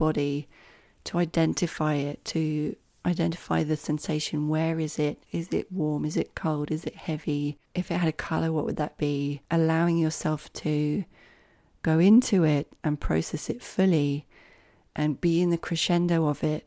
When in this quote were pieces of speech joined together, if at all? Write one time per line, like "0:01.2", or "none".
0:05.3
0:07.6
0:09.4